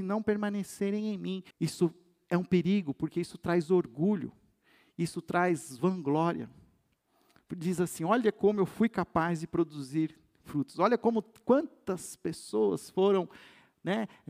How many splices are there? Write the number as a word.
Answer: one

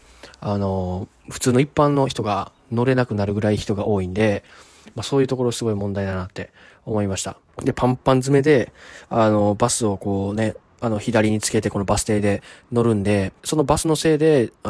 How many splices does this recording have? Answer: two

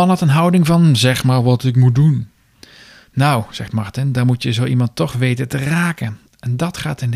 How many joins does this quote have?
zero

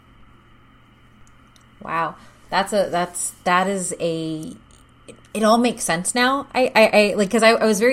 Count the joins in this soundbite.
zero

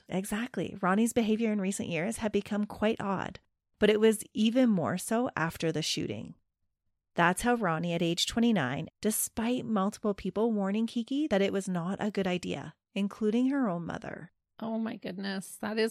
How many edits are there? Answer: one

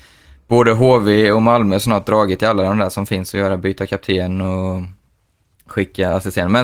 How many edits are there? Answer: zero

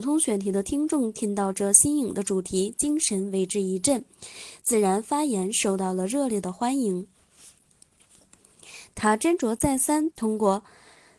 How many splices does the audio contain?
two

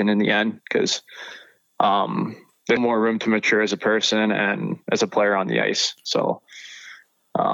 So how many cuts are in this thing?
one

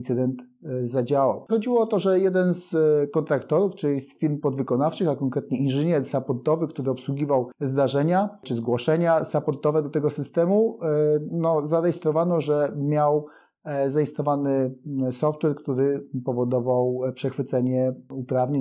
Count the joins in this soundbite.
one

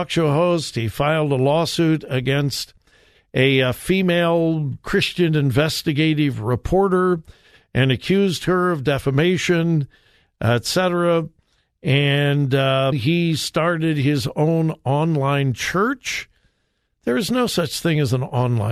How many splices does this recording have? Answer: two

